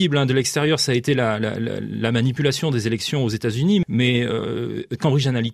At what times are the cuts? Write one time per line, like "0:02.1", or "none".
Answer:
0:03.8